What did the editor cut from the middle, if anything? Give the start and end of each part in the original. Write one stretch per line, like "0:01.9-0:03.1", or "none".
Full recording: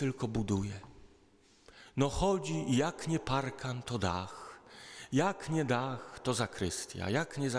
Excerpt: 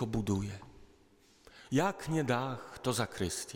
0:01.9-0:05.1